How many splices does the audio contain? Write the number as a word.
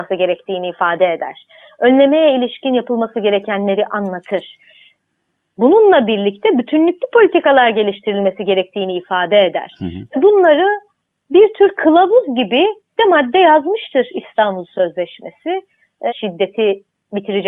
two